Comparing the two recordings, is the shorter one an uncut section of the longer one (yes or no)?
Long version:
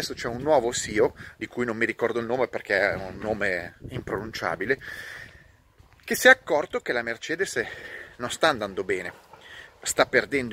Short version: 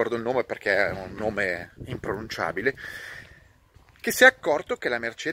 yes